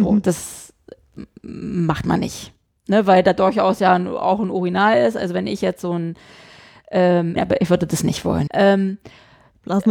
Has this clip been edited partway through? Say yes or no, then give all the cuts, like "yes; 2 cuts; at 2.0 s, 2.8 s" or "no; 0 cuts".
yes; 2 cuts; at 7.4 s, 8.5 s